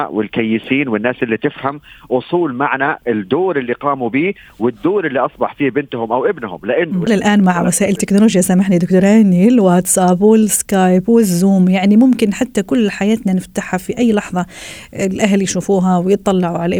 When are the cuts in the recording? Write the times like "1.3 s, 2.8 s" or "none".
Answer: 7.1 s